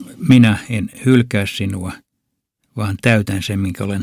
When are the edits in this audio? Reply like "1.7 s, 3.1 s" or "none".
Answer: none